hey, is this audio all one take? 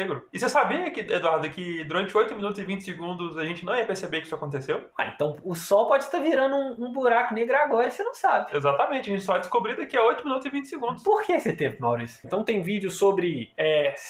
no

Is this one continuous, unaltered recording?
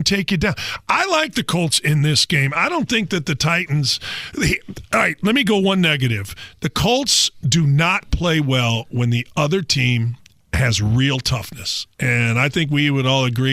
yes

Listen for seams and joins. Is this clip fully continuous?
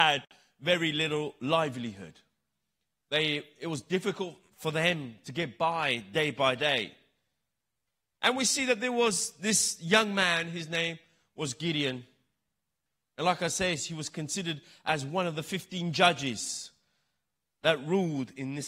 yes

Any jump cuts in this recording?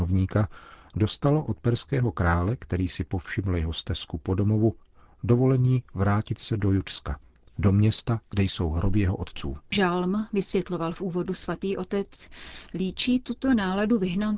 yes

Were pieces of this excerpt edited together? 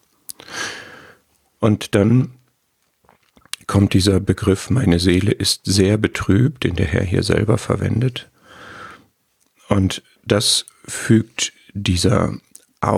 no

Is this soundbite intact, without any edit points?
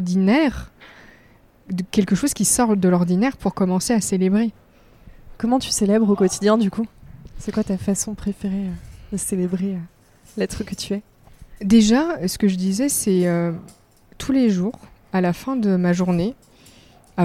yes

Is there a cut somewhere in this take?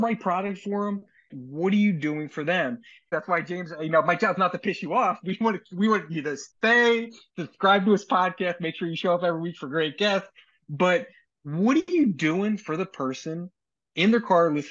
yes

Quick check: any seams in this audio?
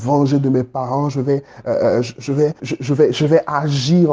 yes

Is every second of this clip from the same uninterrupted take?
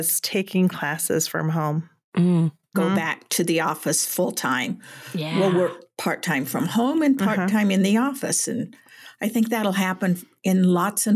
no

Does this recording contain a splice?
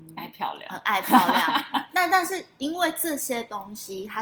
no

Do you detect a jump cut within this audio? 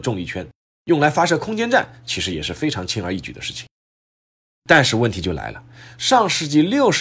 no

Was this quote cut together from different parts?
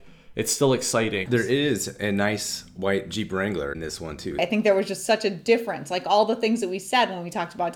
yes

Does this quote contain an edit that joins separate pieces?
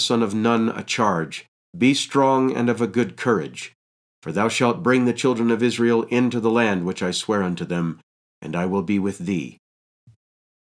yes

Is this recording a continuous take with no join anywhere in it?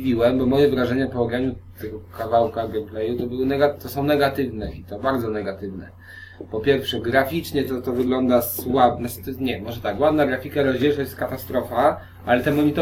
yes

